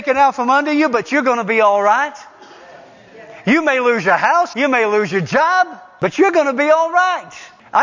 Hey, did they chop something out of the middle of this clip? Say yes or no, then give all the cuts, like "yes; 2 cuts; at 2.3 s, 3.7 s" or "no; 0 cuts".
yes; 1 cut; at 4.5 s